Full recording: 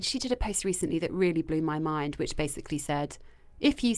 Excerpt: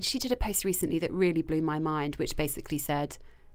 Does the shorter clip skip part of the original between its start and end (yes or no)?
no